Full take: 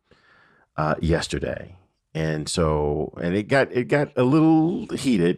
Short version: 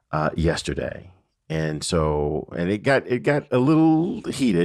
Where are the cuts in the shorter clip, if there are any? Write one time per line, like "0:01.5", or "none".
none